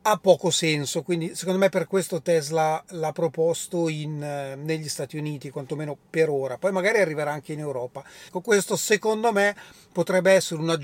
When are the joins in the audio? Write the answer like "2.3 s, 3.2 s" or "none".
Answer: 8.3 s